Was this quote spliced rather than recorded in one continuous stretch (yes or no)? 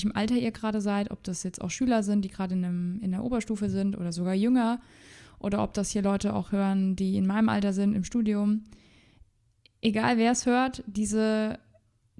no